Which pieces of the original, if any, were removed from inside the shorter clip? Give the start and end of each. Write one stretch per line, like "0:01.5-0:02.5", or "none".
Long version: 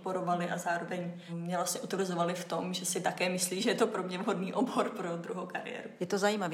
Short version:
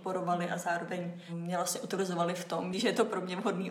0:02.7-0:03.6